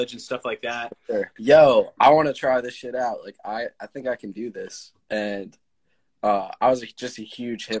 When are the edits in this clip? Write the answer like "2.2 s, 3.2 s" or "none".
1.4 s